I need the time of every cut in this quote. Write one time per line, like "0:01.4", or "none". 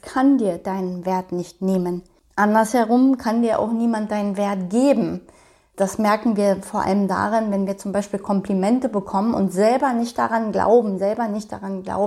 none